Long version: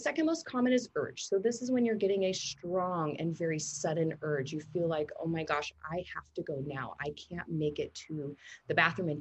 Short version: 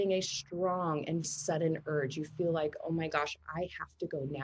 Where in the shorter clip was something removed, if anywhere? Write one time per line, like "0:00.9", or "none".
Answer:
0:01.2